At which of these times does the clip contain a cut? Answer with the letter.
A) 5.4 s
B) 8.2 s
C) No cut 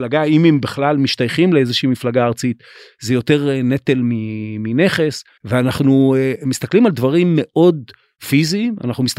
A